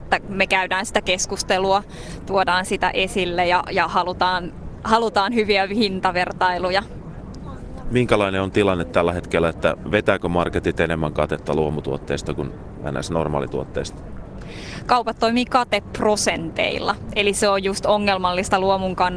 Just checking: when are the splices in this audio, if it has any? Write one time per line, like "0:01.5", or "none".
none